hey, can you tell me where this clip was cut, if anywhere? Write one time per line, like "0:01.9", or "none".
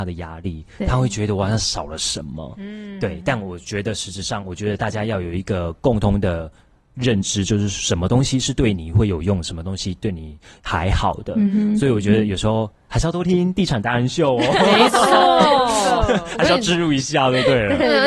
none